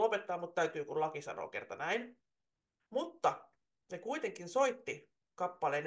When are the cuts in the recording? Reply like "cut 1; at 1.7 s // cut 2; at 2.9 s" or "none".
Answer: cut 1; at 2.8 s